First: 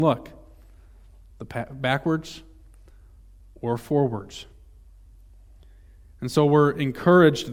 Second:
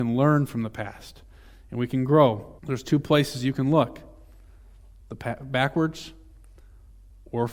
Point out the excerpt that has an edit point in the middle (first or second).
second